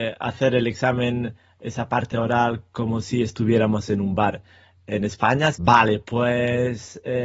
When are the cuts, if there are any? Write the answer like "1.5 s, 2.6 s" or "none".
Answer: 5.5 s